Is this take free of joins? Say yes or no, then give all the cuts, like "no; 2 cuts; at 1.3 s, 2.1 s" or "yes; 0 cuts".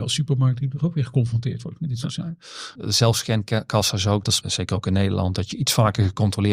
no; 2 cuts; at 2.7 s, 4.4 s